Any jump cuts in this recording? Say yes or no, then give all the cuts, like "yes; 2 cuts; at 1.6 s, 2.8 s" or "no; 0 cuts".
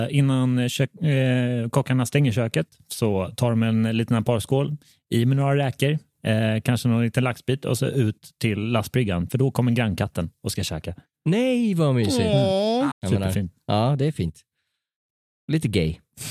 yes; 1 cut; at 12.9 s